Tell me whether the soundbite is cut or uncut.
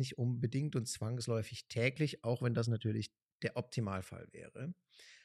uncut